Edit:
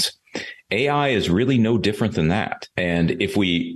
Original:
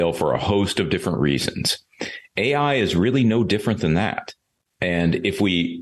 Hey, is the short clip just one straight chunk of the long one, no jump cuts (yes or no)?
no